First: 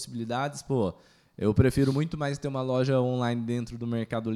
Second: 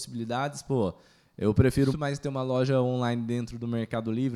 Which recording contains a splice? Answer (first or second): second